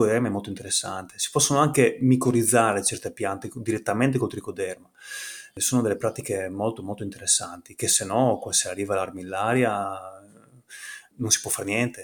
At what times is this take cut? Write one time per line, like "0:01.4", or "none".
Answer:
none